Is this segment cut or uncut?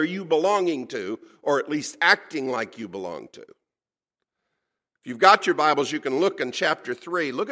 uncut